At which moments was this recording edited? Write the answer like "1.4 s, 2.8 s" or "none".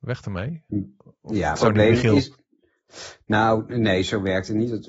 1.6 s